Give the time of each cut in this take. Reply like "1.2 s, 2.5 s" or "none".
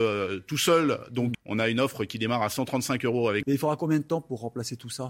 1.3 s, 3.4 s